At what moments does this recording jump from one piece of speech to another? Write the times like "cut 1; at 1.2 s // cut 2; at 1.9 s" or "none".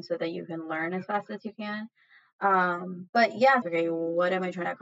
cut 1; at 3.6 s

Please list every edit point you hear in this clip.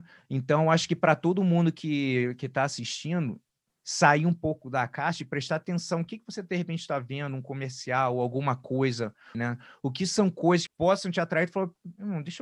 cut 1; at 9.3 s // cut 2; at 10.7 s

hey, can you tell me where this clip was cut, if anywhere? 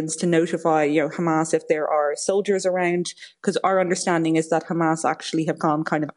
none

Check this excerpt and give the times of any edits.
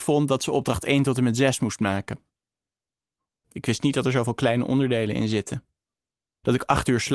cut 1; at 3.4 s

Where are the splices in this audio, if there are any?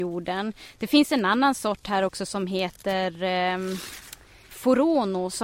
cut 1; at 4.5 s

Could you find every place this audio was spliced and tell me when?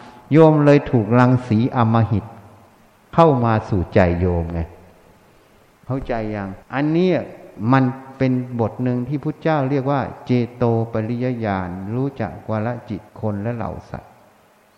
cut 1; at 6.6 s // cut 2; at 13.1 s

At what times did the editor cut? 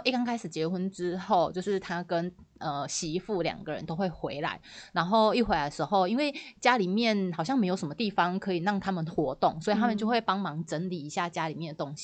none

